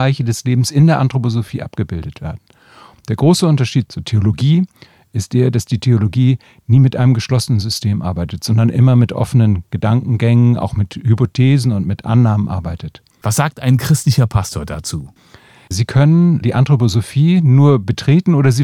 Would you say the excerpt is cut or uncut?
cut